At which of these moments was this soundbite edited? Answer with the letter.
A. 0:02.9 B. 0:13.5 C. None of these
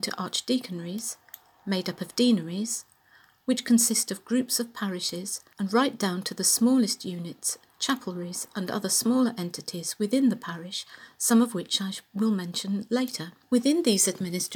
C